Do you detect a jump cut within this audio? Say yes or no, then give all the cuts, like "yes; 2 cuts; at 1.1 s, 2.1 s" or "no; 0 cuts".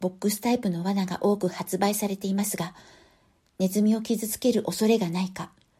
no; 0 cuts